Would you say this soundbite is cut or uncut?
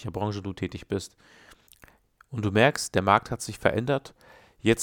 uncut